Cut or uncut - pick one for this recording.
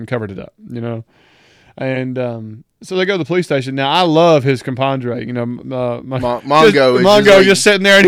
uncut